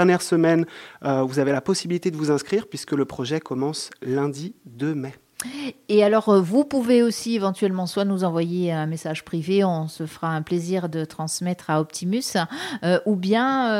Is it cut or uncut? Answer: uncut